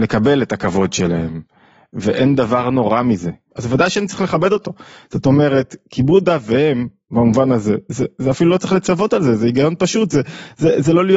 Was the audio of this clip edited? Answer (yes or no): yes